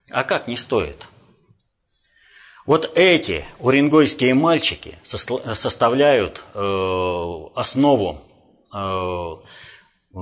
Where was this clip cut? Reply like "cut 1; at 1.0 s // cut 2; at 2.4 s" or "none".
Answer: none